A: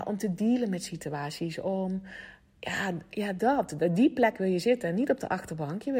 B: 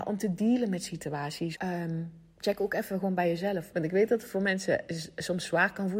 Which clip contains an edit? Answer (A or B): B